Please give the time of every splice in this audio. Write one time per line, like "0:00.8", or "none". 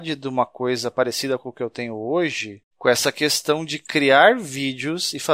0:02.7